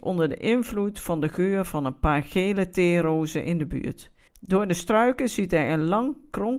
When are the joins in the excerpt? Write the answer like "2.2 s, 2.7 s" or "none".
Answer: 4.3 s